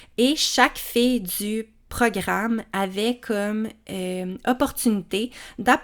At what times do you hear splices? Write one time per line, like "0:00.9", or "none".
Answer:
none